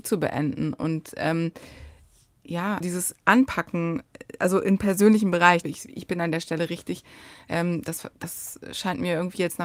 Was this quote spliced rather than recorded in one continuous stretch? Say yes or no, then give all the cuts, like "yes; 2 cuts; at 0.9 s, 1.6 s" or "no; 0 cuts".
yes; 2 cuts; at 2.8 s, 5.6 s